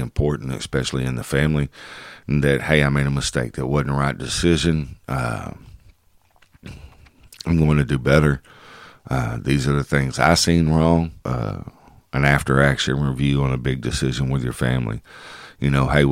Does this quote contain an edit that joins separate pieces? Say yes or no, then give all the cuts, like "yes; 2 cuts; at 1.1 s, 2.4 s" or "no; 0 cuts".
yes; 1 cut; at 11.2 s